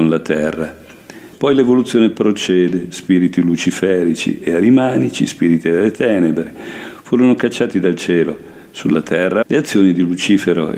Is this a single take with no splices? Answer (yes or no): no